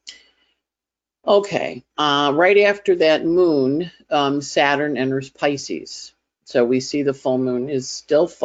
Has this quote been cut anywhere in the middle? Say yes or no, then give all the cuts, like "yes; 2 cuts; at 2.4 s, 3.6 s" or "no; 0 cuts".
no; 0 cuts